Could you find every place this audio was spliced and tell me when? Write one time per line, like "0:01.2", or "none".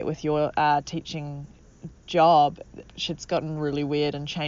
0:02.8